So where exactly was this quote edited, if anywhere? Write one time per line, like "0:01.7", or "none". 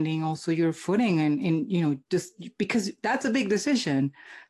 none